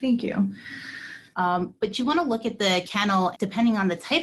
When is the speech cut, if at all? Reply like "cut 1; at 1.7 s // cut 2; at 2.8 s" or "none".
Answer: cut 1; at 1.3 s // cut 2; at 3.3 s